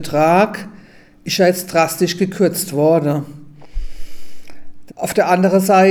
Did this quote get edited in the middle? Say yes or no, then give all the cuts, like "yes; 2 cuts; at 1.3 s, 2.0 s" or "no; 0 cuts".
yes; 1 cut; at 4.9 s